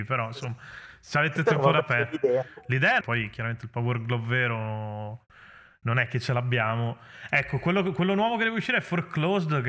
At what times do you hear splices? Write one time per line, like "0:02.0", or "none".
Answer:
0:03.0